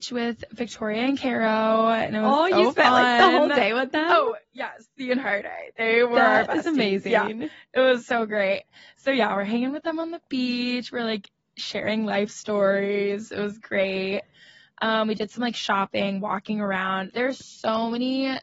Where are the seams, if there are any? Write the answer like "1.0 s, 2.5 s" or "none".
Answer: none